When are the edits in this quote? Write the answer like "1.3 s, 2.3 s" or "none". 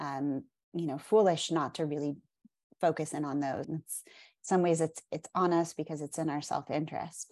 3.6 s